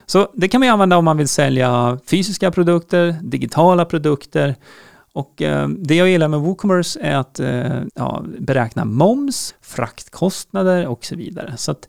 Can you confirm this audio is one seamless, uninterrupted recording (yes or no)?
no